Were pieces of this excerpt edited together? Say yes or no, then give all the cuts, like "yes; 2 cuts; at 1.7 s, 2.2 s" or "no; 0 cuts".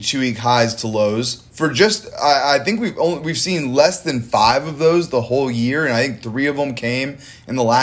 yes; 1 cut; at 1.5 s